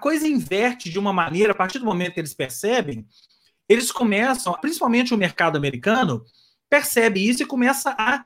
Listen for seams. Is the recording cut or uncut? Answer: cut